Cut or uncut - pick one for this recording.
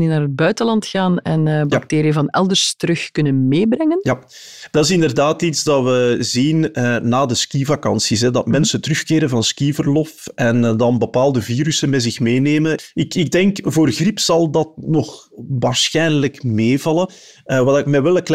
uncut